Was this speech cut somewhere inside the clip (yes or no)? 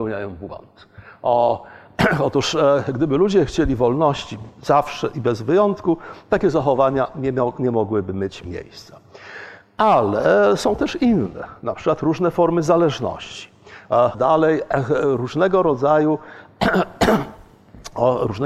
yes